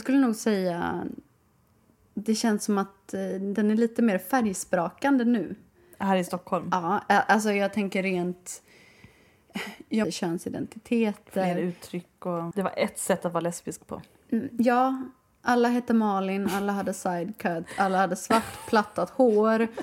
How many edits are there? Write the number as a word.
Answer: two